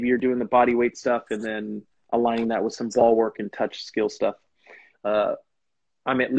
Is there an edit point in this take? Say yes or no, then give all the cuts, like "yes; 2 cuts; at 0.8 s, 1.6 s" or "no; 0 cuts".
yes; 1 cut; at 4.9 s